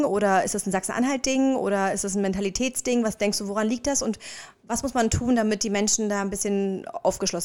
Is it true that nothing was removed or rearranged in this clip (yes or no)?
yes